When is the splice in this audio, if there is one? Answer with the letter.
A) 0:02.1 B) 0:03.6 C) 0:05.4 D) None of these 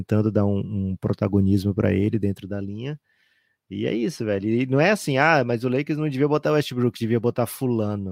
D